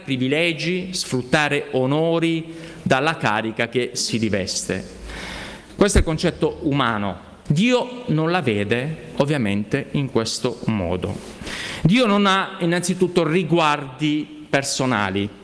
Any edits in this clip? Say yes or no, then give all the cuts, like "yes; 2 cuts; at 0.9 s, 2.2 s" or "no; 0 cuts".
yes; 1 cut; at 7.5 s